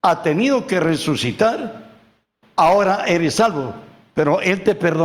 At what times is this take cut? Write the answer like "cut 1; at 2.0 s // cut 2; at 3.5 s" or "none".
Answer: cut 1; at 2.4 s